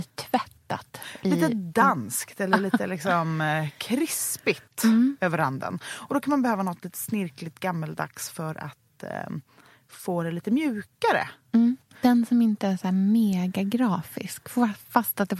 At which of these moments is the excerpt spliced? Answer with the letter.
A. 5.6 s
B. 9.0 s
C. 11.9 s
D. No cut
D